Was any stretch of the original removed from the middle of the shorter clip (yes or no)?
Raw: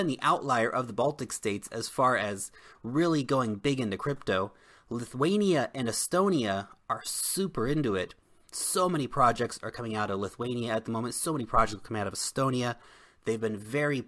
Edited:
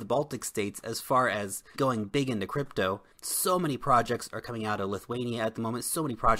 yes